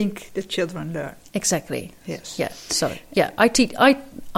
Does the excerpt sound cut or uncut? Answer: uncut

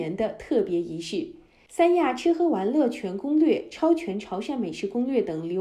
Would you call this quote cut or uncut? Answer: cut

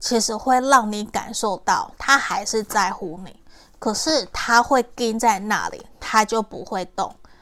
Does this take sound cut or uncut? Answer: cut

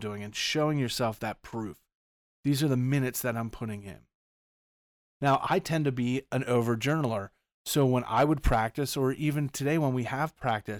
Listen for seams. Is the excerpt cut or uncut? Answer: uncut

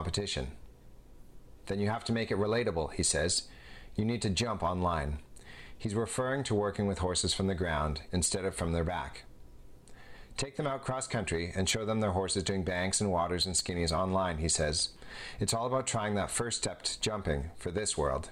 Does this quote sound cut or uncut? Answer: cut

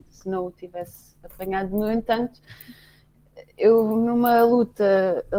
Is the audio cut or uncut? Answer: uncut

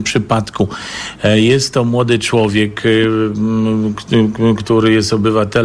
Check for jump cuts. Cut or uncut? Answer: uncut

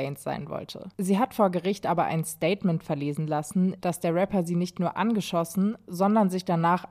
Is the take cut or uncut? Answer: cut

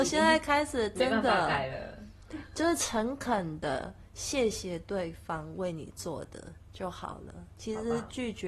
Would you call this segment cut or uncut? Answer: uncut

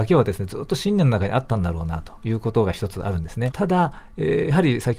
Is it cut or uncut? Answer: cut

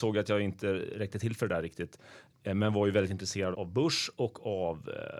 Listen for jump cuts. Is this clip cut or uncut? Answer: cut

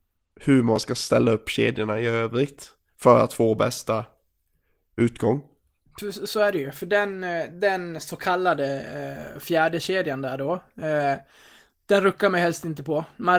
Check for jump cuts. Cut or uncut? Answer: uncut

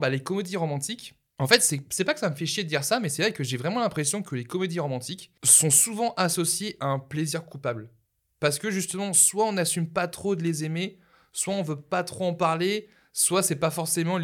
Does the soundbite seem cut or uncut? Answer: uncut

